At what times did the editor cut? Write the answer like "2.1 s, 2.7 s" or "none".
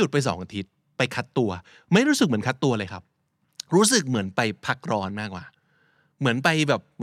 none